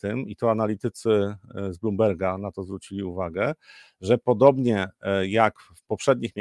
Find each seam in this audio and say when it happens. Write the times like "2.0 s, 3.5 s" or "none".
none